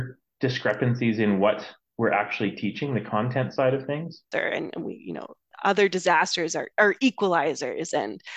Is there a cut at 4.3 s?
yes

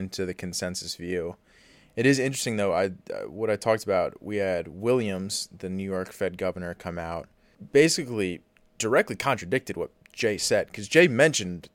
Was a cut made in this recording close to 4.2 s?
no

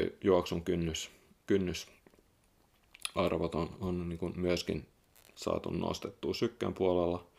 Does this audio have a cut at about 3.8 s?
yes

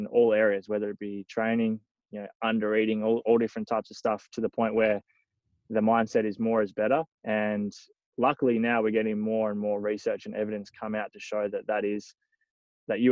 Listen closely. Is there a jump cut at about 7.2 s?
yes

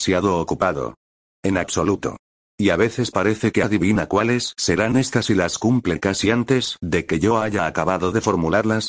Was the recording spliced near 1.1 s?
no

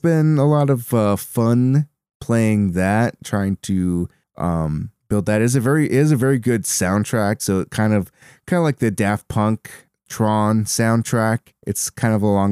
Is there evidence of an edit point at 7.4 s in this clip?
yes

